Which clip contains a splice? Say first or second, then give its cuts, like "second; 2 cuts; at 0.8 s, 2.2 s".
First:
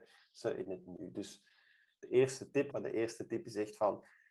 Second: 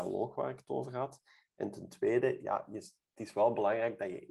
first; 1 cut; at 2.7 s